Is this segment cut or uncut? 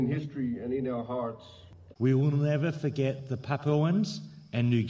cut